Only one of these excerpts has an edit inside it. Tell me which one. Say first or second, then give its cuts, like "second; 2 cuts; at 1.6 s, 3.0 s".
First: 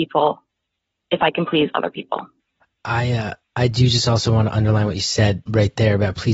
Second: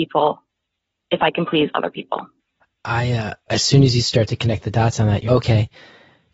second; 2 cuts; at 3.5 s, 5.3 s